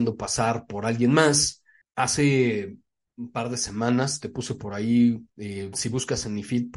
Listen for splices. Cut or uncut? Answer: cut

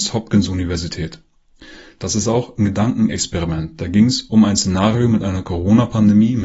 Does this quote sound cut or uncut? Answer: uncut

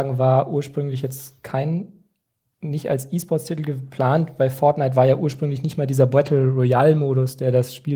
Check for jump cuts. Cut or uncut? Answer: uncut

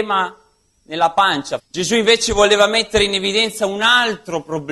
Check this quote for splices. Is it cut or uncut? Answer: cut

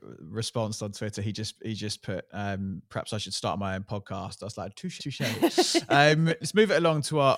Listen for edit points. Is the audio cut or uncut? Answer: cut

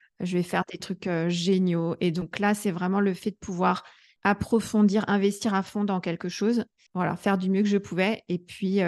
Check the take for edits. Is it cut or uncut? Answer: uncut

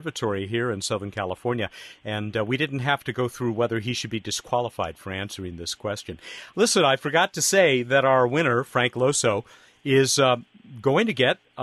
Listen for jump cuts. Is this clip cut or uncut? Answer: uncut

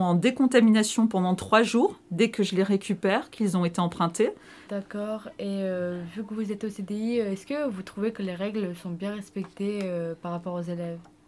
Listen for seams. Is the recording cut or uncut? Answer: cut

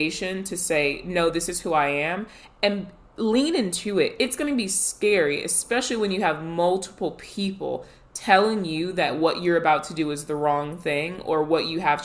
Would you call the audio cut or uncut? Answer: uncut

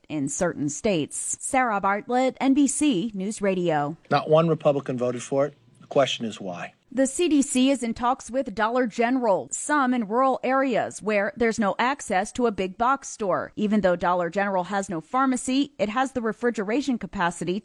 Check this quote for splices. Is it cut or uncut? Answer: cut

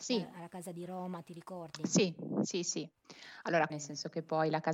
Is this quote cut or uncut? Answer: cut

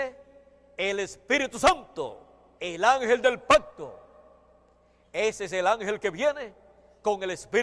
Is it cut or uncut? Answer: cut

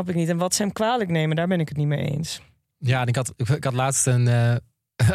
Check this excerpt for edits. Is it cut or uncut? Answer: uncut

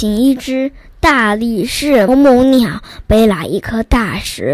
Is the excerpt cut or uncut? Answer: cut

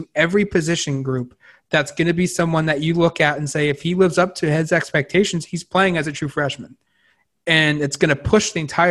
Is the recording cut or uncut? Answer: uncut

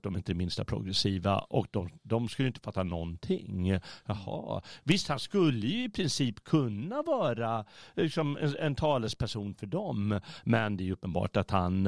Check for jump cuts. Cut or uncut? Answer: uncut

